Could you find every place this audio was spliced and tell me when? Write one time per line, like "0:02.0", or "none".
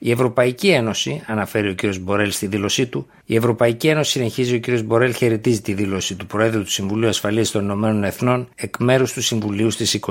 0:03.2
0:08.5